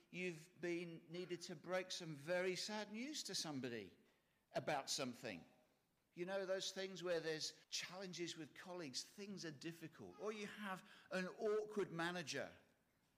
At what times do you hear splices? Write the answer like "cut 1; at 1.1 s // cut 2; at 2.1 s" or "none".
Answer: cut 1; at 6.0 s // cut 2; at 7.6 s